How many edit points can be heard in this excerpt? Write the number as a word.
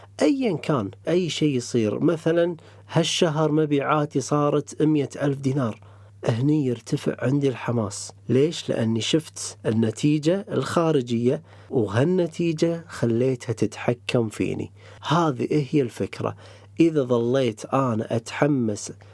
three